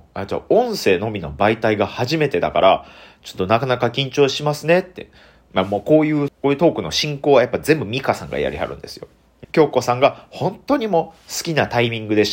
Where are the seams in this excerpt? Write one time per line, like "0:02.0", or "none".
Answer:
0:06.3
0:09.4